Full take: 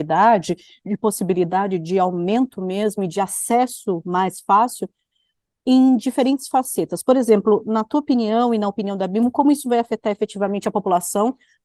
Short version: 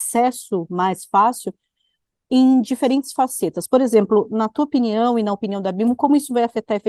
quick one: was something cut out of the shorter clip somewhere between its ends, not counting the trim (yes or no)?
no